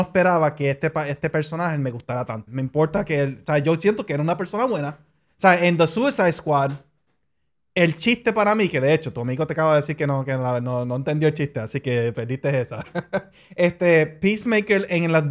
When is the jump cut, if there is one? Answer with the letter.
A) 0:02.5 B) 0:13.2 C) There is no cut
A